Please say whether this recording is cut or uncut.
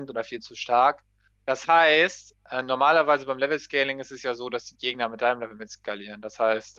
cut